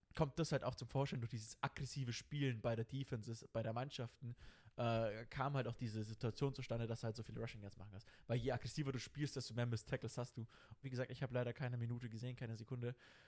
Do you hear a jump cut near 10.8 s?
yes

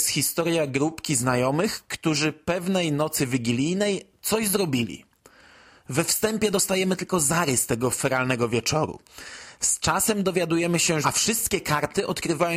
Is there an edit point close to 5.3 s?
no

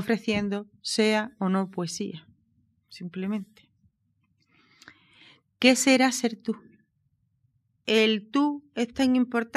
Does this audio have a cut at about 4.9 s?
no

